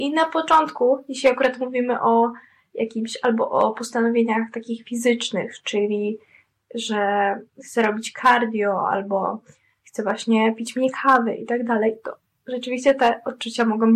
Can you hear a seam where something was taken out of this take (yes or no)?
no